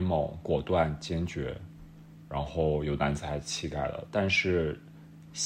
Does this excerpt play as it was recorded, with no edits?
yes; 0 cuts

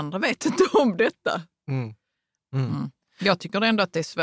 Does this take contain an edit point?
yes; 1 cut; at 2.4 s

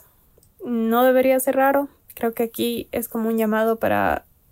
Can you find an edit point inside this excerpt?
yes; 1 cut; at 2.0 s

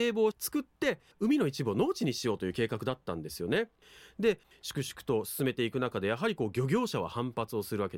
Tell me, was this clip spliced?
no; 0 cuts

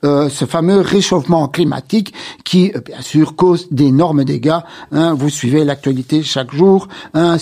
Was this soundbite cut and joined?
no; 0 cuts

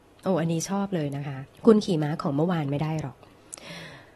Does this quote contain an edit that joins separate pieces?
yes; 1 cut; at 1.6 s

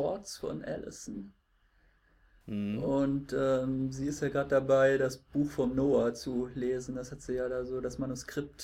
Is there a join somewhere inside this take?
no; 0 cuts

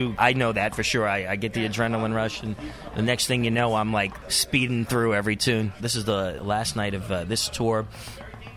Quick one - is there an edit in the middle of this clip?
yes; 1 cut; at 5.8 s

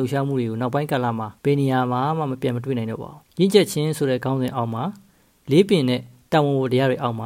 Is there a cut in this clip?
yes; 2 cuts; at 1.4 s, 3.2 s

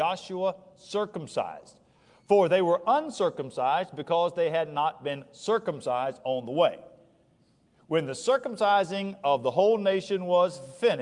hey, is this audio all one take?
yes; 0 cuts

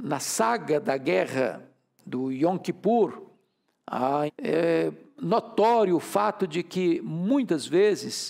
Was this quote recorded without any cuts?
no; 1 cut; at 4.3 s

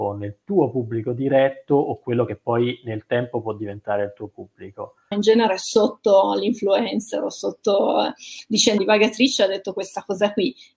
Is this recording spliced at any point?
yes; 2 cuts; at 5.1 s, 8.8 s

